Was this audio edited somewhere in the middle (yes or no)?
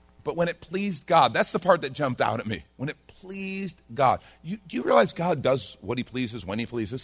no